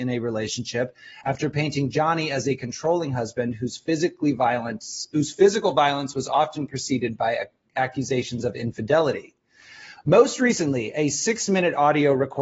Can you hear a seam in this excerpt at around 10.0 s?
no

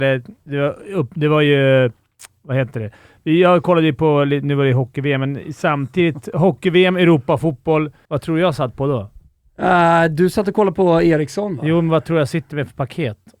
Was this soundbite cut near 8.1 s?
yes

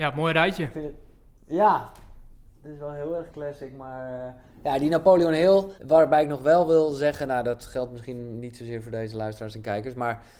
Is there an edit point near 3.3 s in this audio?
yes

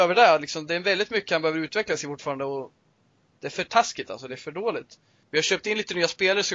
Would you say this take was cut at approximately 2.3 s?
no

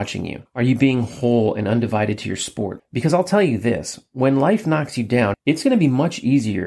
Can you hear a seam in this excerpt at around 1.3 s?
no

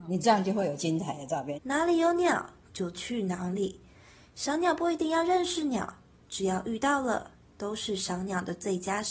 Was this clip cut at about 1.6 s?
yes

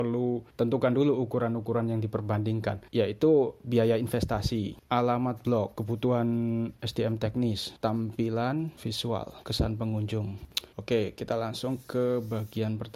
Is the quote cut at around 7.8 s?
yes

